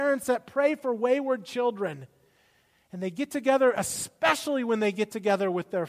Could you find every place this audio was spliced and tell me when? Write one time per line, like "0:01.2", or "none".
none

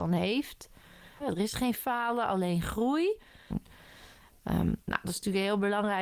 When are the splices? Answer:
0:01.2
0:03.5

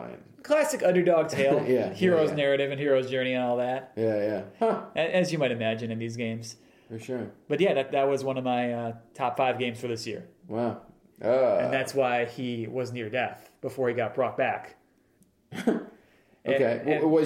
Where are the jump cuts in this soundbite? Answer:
0:11.1
0:15.2

